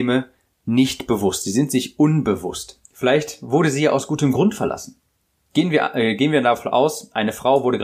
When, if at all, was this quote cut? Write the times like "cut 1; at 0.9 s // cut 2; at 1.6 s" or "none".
cut 1; at 2.8 s // cut 2; at 5.5 s

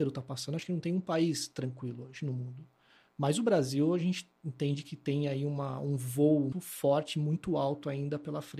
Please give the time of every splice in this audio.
cut 1; at 6.5 s

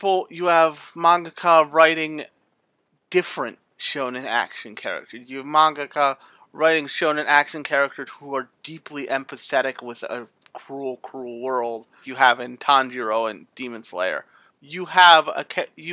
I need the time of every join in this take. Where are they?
cut 1; at 12.0 s // cut 2; at 14.5 s

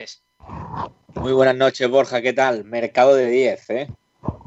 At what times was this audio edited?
none

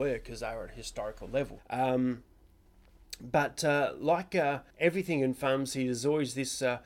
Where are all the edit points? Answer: cut 1; at 1.6 s // cut 2; at 4.7 s

